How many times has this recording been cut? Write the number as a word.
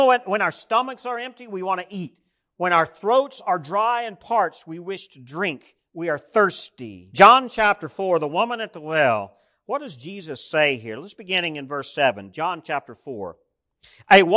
zero